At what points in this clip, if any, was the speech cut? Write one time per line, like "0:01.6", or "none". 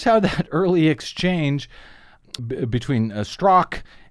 0:02.4